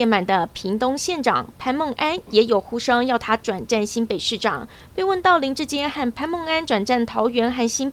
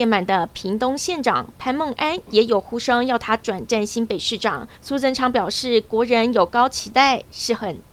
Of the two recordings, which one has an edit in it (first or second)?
second